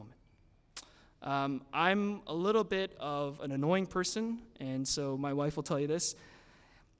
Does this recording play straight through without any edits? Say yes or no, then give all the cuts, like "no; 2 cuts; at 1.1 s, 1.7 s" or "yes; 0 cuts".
yes; 0 cuts